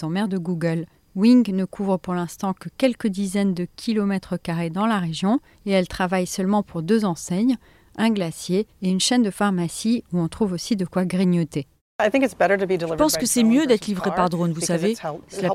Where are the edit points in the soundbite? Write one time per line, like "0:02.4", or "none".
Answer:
none